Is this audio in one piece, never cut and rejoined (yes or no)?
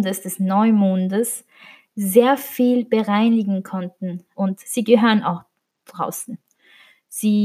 no